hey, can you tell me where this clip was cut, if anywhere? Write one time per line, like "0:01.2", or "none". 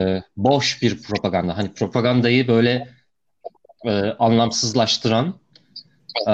none